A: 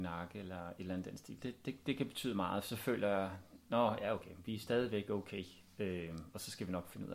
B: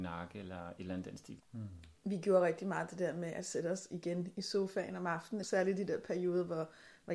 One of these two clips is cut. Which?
B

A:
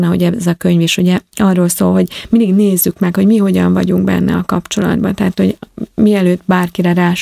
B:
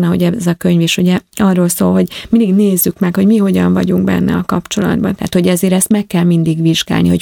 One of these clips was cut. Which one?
B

